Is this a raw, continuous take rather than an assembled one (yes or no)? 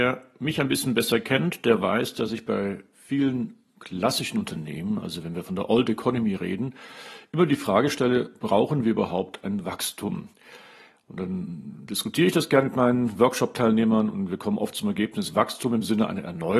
yes